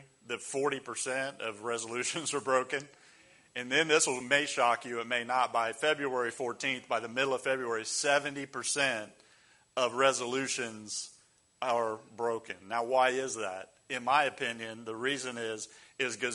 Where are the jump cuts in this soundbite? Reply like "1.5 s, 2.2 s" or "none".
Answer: none